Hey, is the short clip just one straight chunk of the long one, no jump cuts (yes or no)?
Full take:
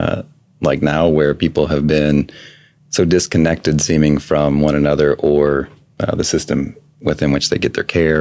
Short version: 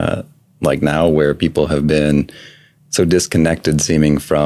yes